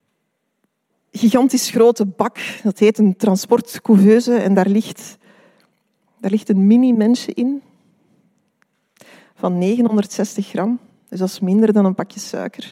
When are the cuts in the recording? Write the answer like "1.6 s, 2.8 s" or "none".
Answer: none